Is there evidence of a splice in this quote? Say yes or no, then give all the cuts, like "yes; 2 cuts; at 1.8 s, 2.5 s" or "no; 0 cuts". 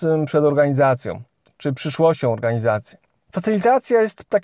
no; 0 cuts